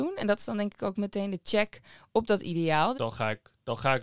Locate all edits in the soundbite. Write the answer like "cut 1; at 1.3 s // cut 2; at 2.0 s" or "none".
cut 1; at 2.9 s